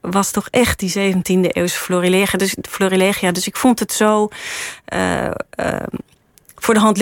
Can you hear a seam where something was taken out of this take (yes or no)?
no